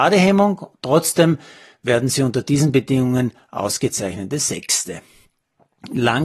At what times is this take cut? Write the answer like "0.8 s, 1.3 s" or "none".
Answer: none